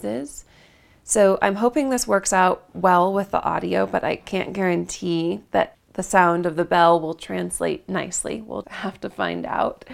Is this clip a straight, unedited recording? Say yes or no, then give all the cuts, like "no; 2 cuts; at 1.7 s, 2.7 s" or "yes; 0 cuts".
no; 2 cuts; at 5.7 s, 8.6 s